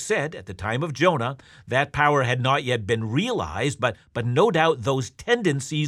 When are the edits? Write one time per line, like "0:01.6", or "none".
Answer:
none